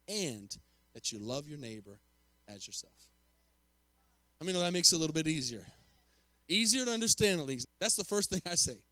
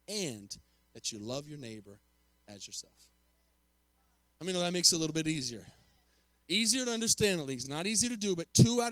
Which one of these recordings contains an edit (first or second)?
first